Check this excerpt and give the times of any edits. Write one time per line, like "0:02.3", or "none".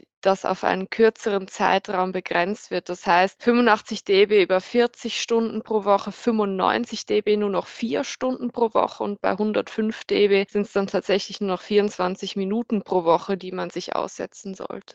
none